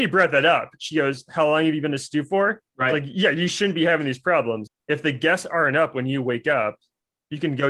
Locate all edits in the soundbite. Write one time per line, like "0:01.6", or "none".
0:02.7
0:04.7